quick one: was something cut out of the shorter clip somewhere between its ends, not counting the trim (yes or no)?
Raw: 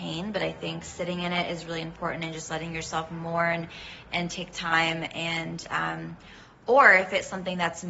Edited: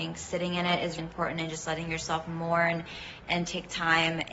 yes